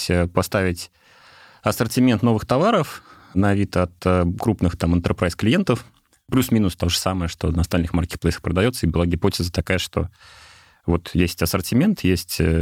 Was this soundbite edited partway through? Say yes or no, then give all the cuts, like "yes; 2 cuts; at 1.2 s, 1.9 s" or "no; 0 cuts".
no; 0 cuts